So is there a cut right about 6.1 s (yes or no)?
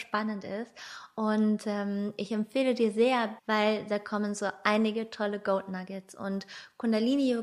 no